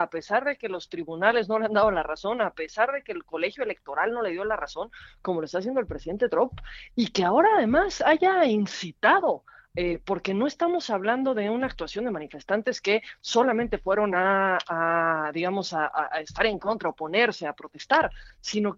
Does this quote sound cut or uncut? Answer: uncut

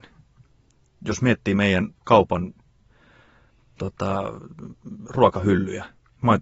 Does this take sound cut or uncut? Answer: uncut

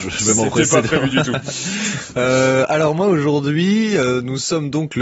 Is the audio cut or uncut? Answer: uncut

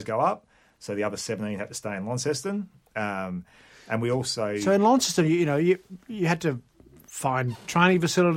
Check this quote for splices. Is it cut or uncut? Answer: uncut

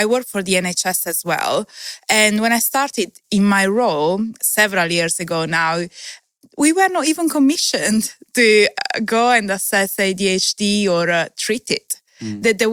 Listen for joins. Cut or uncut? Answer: uncut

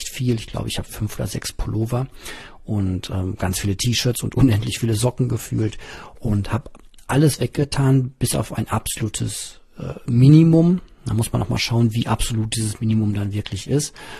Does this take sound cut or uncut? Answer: uncut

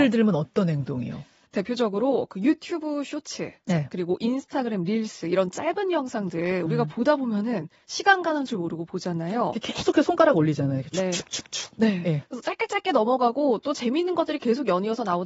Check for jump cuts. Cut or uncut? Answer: uncut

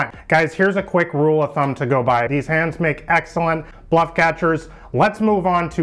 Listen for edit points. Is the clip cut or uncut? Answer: cut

